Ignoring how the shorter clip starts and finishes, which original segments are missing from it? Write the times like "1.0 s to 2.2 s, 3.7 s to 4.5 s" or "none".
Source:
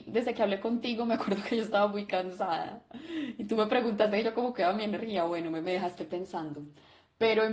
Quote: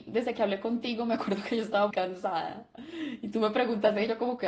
1.9 s to 2.1 s